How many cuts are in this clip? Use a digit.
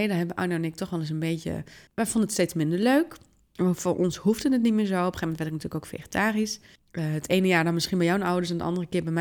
2